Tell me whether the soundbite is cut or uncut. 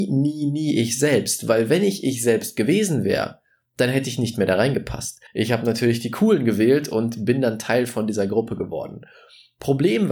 cut